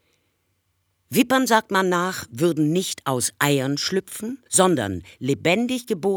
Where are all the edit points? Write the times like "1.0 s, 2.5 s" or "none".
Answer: 4.5 s